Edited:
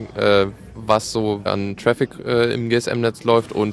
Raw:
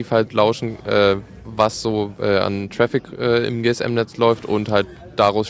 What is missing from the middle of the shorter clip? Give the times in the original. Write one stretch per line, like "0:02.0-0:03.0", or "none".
0:02.1-0:02.4

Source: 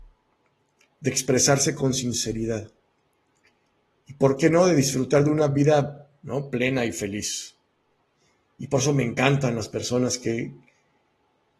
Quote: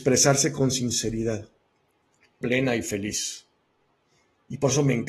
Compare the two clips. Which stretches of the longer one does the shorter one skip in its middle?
0:03.6-0:06.5

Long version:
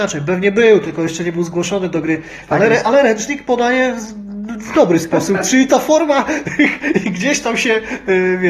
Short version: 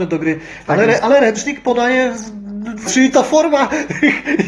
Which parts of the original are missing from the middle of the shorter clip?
0:04.7-0:05.4

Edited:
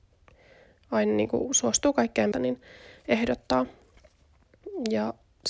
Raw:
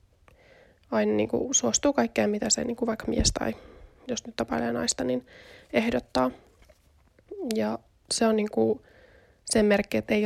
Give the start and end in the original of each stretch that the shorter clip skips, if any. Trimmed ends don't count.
0:02.3-0:05.0

